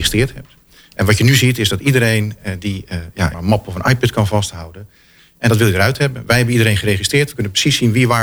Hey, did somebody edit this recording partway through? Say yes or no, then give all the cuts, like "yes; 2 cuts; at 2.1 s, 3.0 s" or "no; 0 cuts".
yes; 2 cuts; at 3.3 s, 5.2 s